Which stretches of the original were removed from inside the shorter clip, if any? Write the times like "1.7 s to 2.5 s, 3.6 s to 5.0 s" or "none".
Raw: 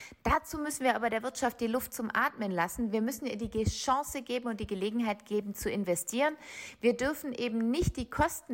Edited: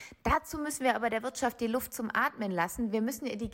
none